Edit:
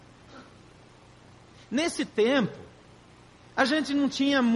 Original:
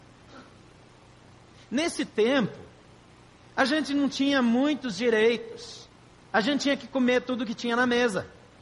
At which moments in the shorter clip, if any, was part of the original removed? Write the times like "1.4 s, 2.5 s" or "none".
none